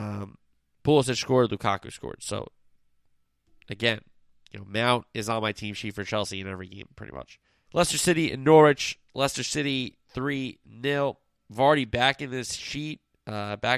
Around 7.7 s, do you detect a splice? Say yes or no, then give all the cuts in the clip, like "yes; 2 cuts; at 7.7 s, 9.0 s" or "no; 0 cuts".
yes; 1 cut; at 7.7 s